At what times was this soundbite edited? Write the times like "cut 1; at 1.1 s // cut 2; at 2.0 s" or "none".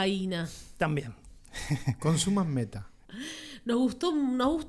none